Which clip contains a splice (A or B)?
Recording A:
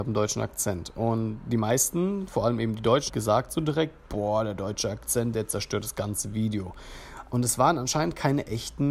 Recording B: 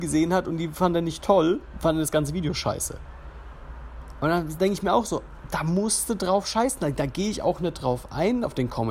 A